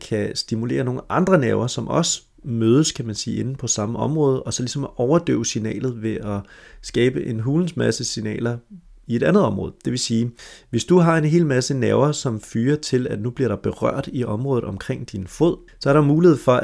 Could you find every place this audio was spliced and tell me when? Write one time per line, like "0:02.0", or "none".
none